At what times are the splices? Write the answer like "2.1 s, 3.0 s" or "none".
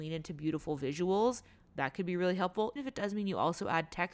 2.8 s

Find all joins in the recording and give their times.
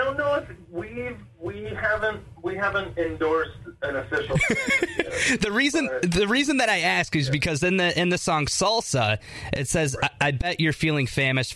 none

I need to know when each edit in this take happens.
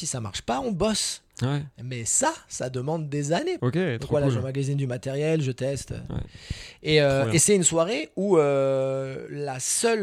3.6 s

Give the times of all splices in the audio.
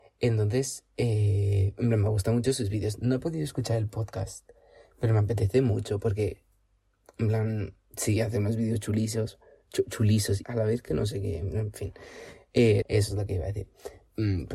10.4 s, 12.8 s

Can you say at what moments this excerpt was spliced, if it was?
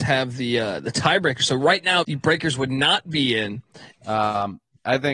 2.0 s, 3.9 s

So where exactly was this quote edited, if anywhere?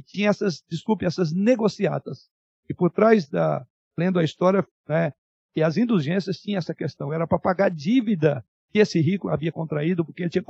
4.8 s

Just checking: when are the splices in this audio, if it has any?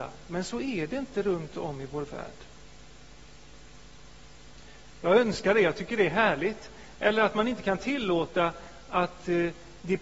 4.9 s, 7.0 s

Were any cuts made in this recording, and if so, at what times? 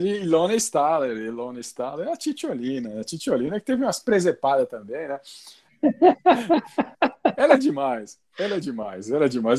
5.7 s

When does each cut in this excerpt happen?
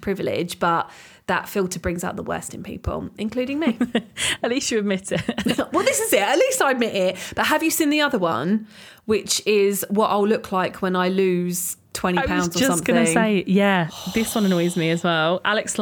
11.9 s

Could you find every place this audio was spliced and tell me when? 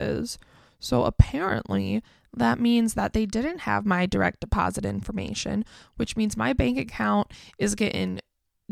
none

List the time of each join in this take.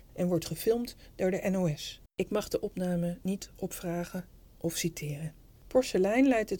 2.1 s, 5.5 s

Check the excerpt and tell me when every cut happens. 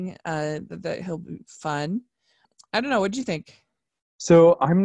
none

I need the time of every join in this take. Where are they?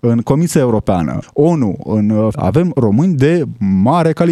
1.2 s, 2.3 s

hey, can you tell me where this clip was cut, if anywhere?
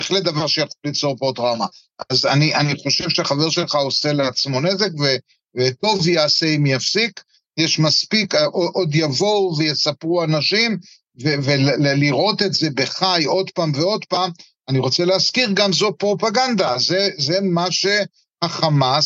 none

